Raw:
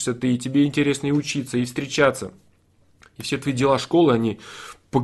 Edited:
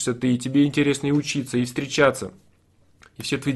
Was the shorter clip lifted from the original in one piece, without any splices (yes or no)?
yes